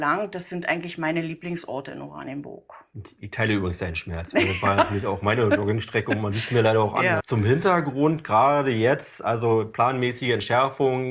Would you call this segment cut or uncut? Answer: cut